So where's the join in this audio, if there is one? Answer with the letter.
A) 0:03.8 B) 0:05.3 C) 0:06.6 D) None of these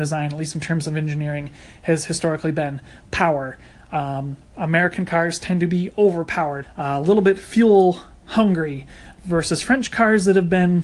C